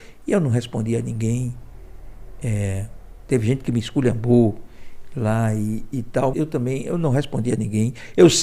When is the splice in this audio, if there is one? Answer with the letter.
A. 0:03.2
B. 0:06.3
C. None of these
B